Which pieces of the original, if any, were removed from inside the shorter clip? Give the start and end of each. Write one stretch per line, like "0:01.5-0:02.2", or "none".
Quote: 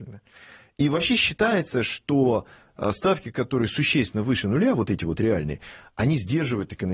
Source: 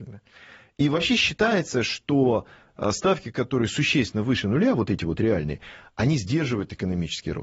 none